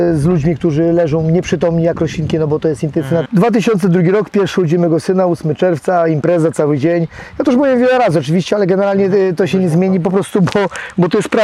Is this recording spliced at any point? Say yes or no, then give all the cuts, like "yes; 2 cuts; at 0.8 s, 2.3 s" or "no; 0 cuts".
yes; 1 cut; at 3.3 s